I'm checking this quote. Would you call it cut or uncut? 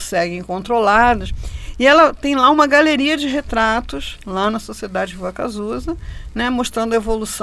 uncut